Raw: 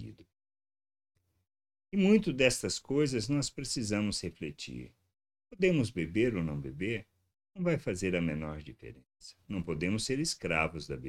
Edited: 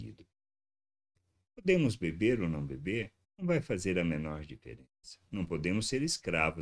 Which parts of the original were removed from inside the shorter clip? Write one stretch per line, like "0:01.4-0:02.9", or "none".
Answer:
0:01.5-0:05.4
0:07.2-0:07.4